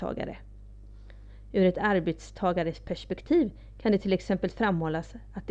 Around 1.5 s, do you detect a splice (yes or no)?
no